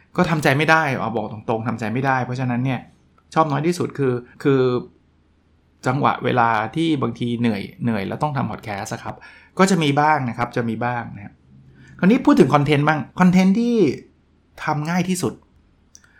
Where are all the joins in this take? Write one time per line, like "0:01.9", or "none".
0:04.3
0:13.1